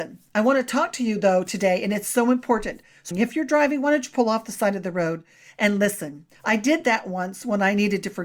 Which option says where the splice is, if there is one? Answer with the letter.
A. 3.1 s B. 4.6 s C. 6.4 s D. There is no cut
A